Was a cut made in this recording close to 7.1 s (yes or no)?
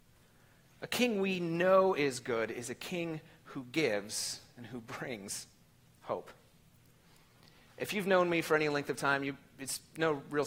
no